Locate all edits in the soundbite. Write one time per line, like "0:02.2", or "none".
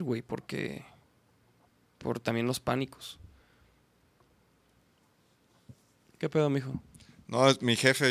none